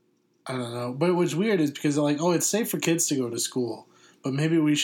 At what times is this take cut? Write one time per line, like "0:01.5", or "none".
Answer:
none